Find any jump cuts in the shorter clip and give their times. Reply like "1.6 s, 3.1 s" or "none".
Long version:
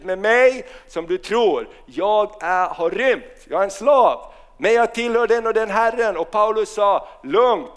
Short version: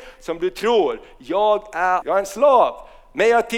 2.0 s